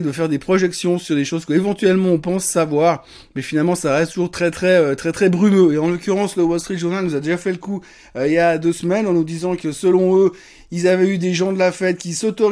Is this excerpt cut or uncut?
uncut